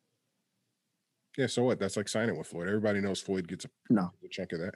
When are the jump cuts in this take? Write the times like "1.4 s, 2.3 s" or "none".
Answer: none